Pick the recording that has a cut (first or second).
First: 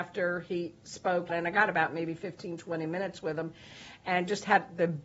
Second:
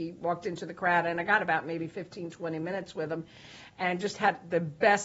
first